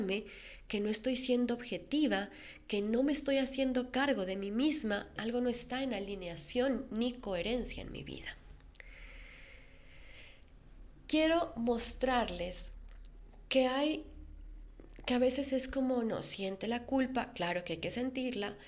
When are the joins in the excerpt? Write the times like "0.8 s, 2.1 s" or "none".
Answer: 5.2 s